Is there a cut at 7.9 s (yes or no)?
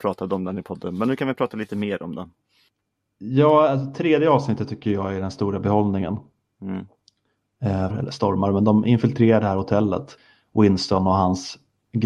yes